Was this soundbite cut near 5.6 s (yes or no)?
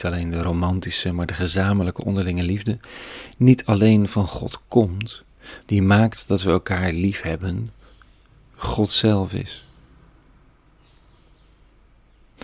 yes